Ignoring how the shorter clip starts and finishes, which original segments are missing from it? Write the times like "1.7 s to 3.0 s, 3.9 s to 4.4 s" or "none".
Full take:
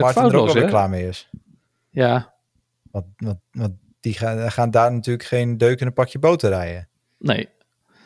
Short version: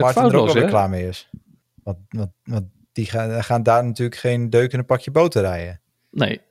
1.6 s to 2.7 s